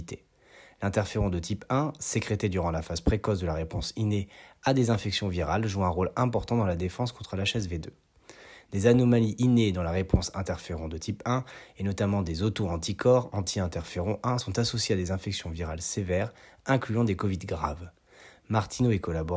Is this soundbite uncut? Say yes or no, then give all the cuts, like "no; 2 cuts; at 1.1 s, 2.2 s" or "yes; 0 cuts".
yes; 0 cuts